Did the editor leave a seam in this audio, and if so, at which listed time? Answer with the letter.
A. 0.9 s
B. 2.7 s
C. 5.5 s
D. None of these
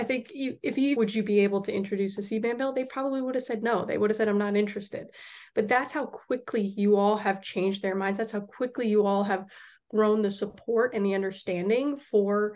A